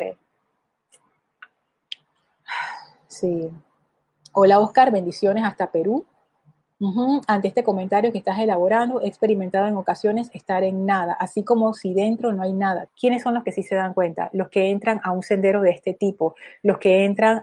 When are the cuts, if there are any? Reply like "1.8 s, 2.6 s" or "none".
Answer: 6.7 s, 12.9 s